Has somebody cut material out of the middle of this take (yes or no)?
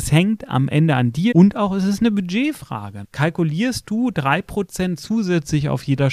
yes